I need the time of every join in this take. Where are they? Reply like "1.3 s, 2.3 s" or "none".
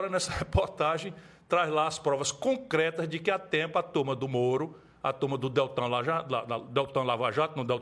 none

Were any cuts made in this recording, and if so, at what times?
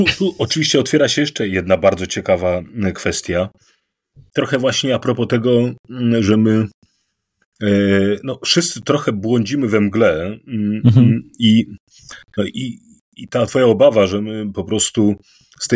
none

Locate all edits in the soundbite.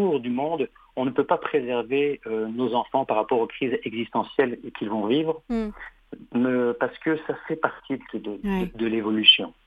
none

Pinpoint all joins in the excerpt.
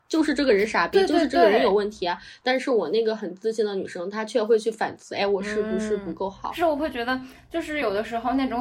none

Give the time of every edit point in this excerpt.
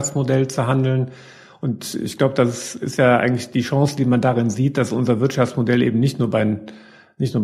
3.5 s

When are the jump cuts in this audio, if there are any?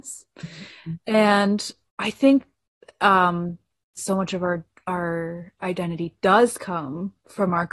4.0 s

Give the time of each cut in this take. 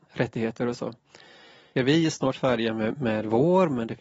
1.7 s, 3.0 s

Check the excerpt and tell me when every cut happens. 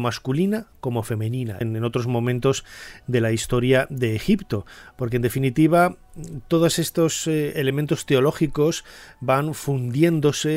1.6 s

